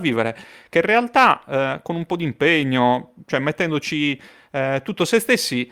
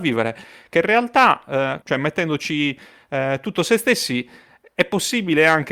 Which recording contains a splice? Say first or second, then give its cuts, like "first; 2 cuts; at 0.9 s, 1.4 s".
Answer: second; 1 cut; at 1.8 s